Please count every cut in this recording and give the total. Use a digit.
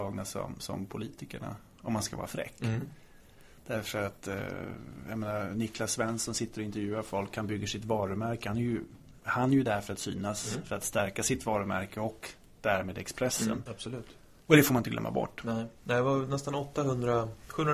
0